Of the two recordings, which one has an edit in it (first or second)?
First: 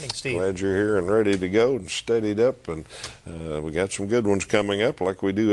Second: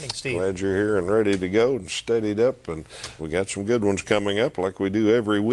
second